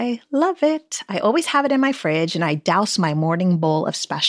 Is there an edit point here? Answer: no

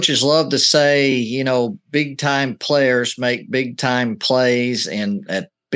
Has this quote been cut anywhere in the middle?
no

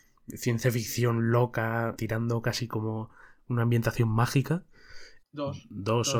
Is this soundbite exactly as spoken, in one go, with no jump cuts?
no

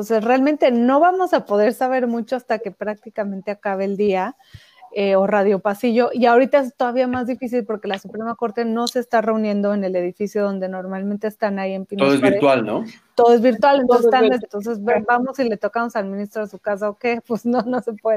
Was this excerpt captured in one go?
no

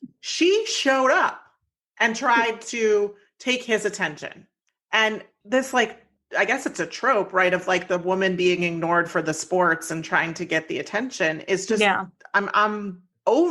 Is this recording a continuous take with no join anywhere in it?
yes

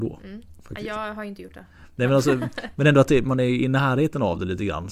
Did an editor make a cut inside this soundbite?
no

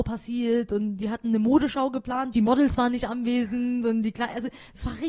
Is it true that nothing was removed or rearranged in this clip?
no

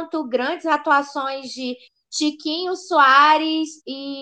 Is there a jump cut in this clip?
no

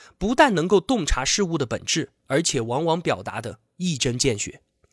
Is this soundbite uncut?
yes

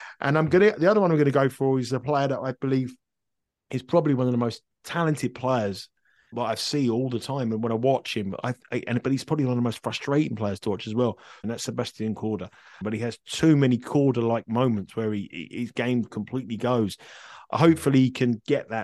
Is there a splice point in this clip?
yes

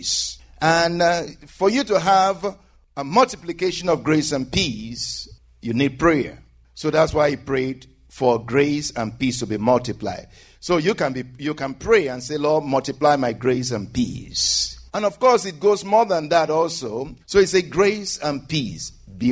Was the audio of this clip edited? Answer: yes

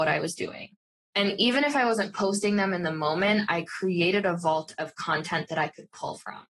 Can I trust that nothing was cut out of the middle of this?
yes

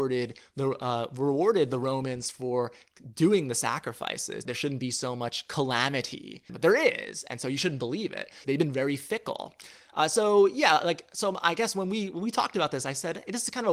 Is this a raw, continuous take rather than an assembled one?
no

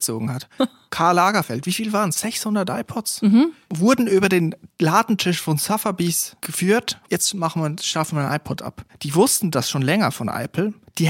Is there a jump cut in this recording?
yes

